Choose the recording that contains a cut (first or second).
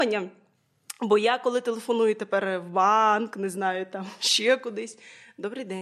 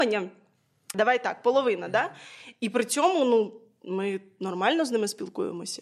second